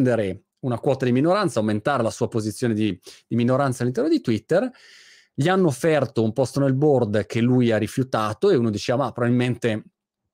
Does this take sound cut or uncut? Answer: uncut